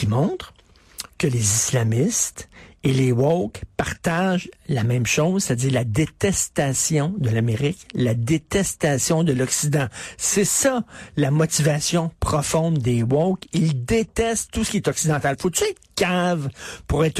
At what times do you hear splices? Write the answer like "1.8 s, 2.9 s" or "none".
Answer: none